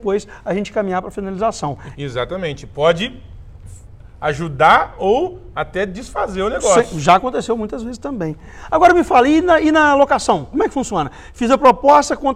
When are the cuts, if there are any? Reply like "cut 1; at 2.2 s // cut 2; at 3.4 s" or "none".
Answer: cut 1; at 1.9 s